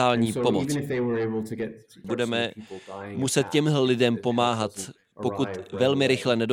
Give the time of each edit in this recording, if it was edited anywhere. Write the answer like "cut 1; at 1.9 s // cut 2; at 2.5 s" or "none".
cut 1; at 2.0 s